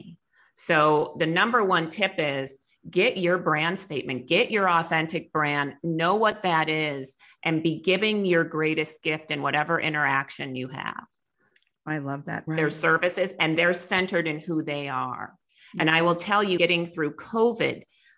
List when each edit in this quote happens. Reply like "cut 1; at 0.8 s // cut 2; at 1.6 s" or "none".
cut 1; at 12.5 s // cut 2; at 16.6 s